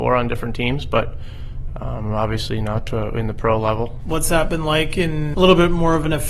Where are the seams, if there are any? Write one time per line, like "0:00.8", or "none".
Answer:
0:04.0
0:05.3